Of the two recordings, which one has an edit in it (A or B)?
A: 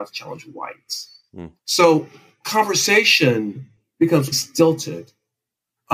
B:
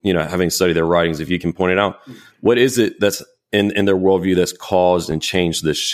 A